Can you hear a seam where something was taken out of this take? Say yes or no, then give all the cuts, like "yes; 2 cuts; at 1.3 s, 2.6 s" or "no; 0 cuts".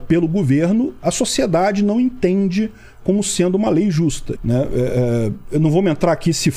yes; 1 cut; at 4.4 s